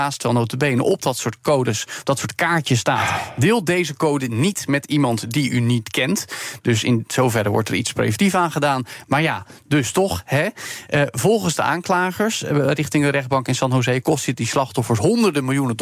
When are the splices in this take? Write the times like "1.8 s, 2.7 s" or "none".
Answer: none